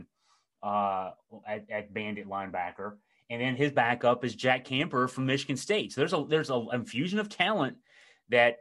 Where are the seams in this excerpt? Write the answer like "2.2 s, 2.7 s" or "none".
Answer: none